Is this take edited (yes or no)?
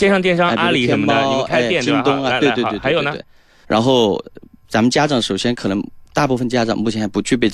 yes